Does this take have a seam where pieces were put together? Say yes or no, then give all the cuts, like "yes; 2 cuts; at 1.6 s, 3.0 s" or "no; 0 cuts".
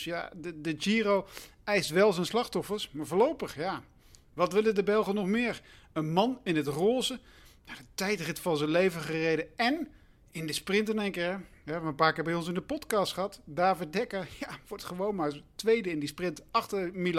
no; 0 cuts